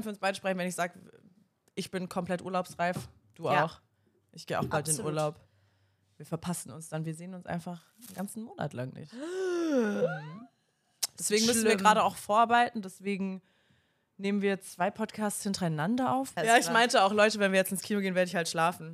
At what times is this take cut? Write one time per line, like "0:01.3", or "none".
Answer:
0:16.4